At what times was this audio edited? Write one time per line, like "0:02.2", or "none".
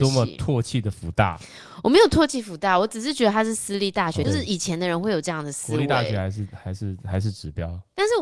0:04.2